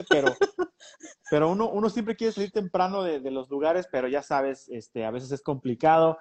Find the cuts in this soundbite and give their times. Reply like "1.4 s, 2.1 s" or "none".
none